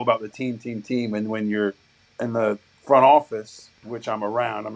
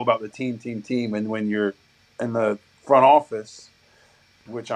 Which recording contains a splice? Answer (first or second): first